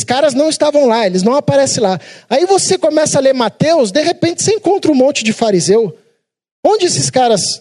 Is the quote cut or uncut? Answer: uncut